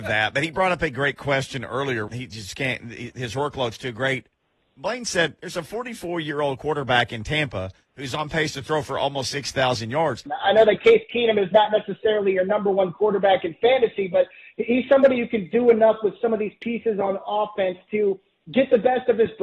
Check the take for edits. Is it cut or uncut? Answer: cut